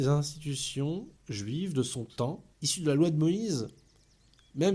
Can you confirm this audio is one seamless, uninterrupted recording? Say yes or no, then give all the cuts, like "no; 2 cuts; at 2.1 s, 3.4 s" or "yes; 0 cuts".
no; 2 cuts; at 1.2 s, 2.5 s